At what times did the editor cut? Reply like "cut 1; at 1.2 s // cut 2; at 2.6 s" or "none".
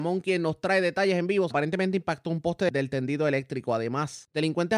cut 1; at 1.5 s